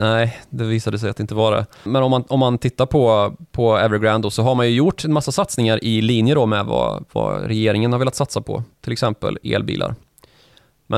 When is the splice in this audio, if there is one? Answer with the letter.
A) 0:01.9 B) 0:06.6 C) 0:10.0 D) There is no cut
A